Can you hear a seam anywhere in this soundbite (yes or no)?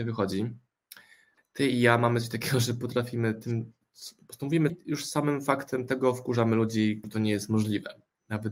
yes